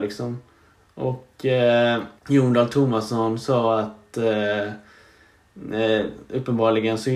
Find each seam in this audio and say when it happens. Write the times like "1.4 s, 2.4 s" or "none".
2.2 s